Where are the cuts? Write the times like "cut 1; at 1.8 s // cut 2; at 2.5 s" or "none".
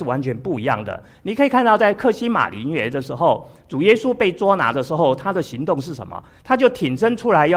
none